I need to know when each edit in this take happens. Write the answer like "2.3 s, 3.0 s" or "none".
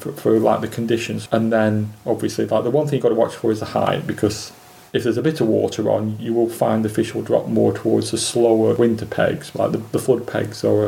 1.3 s